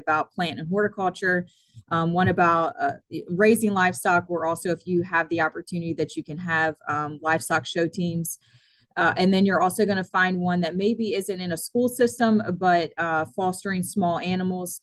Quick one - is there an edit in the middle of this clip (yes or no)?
no